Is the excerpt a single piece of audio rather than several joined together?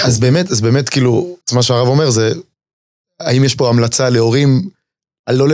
no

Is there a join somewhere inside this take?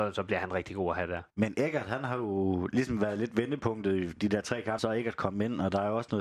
yes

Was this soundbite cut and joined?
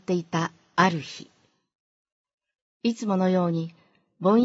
no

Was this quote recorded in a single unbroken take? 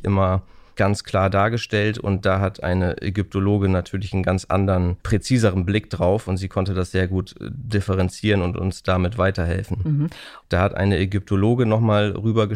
no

